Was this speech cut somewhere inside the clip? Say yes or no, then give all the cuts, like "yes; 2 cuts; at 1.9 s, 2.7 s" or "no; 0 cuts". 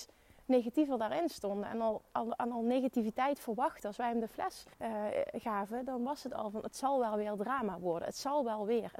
yes; 1 cut; at 4.7 s